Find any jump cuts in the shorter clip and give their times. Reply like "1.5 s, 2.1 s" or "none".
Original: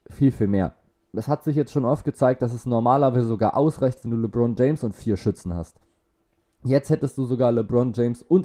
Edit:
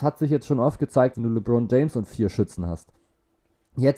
1.1 s